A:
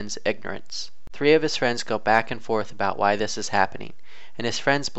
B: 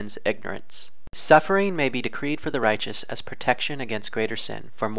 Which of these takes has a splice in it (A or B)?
A